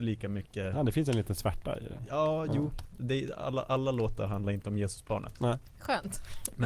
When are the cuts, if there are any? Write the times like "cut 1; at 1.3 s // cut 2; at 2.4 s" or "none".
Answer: none